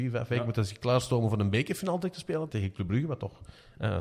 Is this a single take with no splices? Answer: no; 1 cut; at 2.5 s

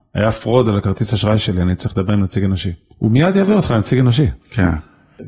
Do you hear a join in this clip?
no; 0 cuts

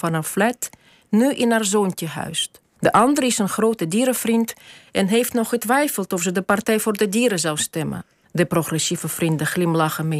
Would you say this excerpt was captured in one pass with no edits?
no; 2 cuts; at 2.8 s, 8.2 s

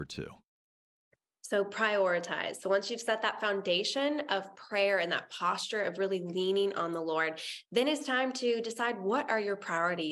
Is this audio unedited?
yes; 0 cuts

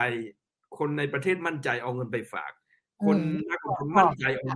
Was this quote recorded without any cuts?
yes; 0 cuts

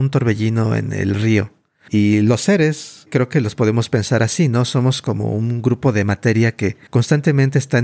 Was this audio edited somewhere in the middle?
no; 0 cuts

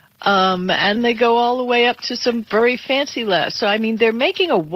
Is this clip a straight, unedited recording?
no; 1 cut; at 1.0 s

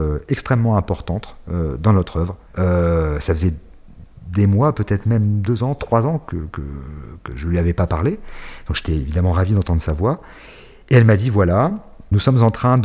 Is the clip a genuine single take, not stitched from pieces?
no; 2 cuts; at 2.5 s, 6.3 s

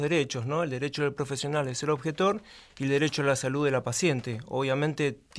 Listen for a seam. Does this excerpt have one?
no; 0 cuts

